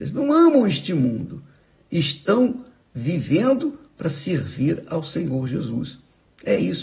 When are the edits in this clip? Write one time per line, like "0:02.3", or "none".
none